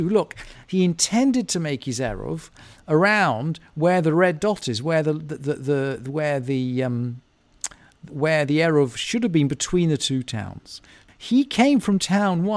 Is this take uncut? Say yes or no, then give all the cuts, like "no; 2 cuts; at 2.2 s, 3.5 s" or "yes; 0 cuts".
no; 2 cuts; at 8.1 s, 11.1 s